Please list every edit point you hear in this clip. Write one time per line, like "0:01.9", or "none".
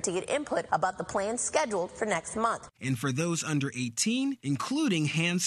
0:02.7
0:04.4